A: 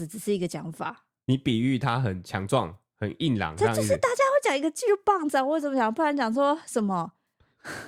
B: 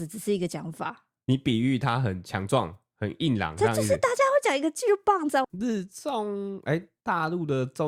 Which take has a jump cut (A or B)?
B